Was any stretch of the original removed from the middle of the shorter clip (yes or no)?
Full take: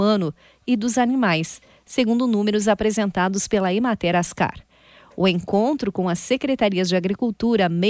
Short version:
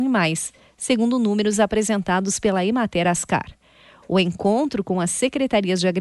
no